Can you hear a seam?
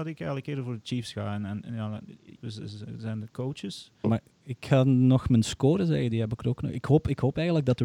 yes; 2 cuts; at 2.4 s, 4.0 s

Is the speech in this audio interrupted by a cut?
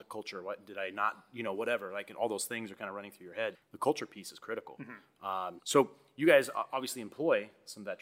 yes; 2 cuts; at 3.5 s, 5.6 s

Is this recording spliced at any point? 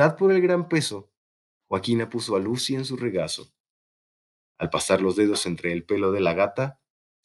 no; 0 cuts

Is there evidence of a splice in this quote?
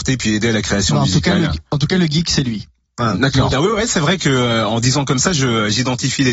yes; 1 cut; at 3.5 s

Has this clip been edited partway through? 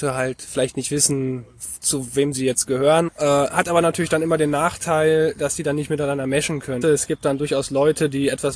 yes; 2 cuts; at 3.1 s, 6.8 s

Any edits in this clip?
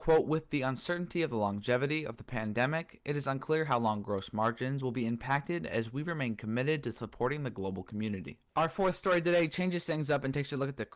yes; 1 cut; at 8.5 s

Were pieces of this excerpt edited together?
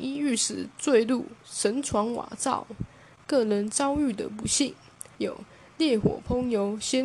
yes; 1 cut; at 5.2 s

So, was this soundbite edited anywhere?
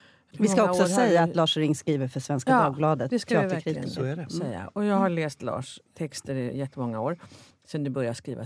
no; 0 cuts

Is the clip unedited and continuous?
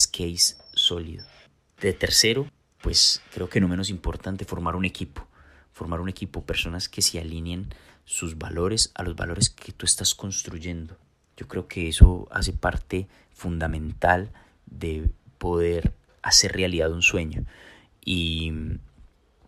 yes; 0 cuts

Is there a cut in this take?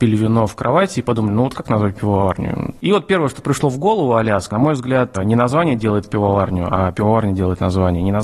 yes; 1 cut; at 4.5 s

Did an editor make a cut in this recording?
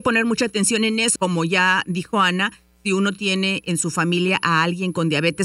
yes; 1 cut; at 1.2 s

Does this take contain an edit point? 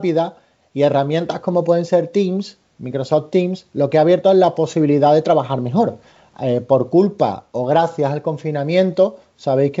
no; 0 cuts

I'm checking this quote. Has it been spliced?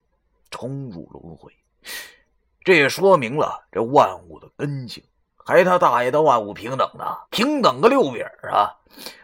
yes; 1 cut; at 7.3 s

